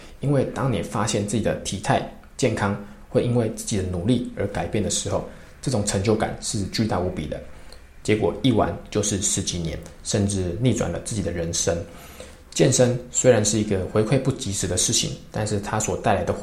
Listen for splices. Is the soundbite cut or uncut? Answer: cut